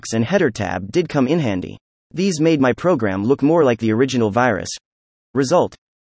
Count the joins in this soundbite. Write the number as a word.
zero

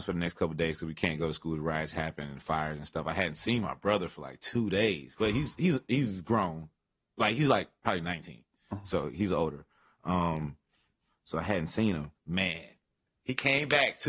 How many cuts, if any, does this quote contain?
zero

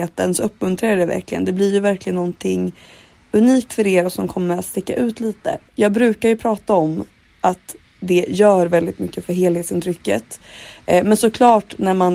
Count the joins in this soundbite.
one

